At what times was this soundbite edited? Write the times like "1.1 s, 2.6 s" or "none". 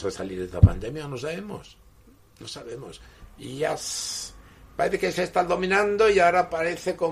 none

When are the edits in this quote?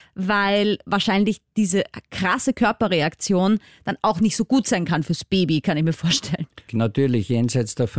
6.7 s

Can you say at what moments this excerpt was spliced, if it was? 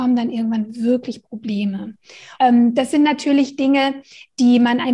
2.4 s

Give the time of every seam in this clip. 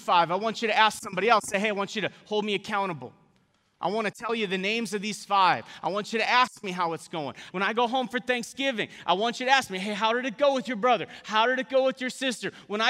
7.5 s

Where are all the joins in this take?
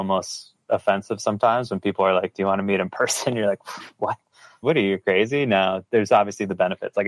4.6 s

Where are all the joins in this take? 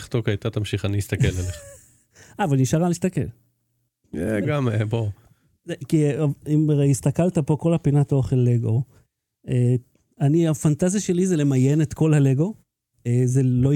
4.4 s, 6.4 s

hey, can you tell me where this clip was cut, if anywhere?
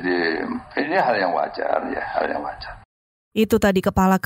none

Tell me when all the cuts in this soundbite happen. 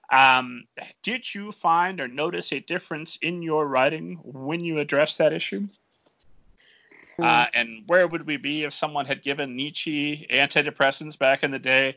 7.2 s

